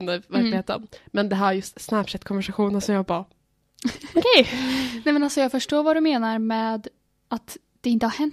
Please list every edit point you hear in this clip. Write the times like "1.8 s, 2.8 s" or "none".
none